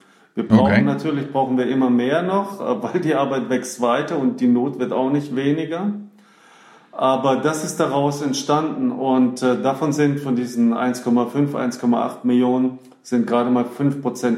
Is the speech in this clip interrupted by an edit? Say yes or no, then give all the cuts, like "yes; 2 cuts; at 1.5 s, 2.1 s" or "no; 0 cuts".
no; 0 cuts